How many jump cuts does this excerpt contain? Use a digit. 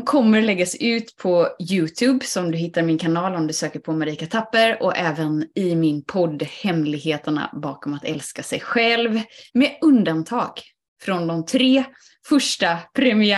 1